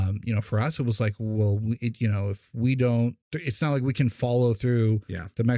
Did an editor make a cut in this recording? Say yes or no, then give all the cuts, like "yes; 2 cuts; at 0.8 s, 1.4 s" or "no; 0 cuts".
yes; 1 cut; at 3.2 s